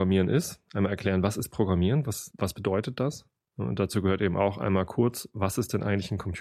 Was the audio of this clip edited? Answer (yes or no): yes